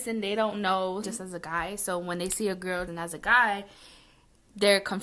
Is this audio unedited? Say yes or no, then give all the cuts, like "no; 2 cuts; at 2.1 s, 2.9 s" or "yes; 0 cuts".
no; 2 cuts; at 1.0 s, 2.9 s